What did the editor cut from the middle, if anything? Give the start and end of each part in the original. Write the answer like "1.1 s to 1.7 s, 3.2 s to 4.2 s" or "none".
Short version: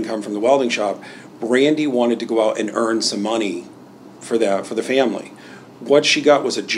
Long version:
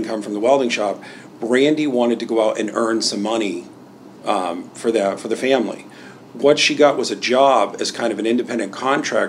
4.2 s to 4.7 s